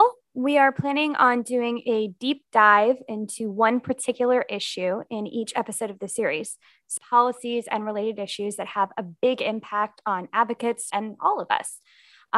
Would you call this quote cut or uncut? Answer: cut